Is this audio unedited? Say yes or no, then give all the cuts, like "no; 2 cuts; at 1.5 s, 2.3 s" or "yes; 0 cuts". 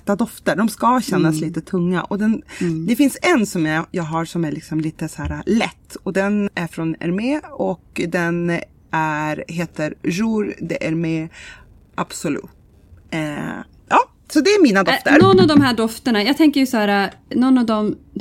no; 1 cut; at 6.5 s